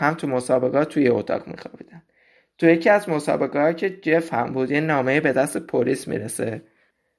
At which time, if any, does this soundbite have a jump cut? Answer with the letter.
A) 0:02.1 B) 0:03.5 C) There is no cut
C